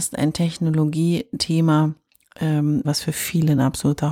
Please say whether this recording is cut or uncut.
cut